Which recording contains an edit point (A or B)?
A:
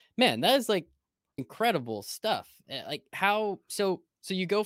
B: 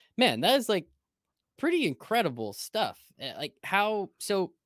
A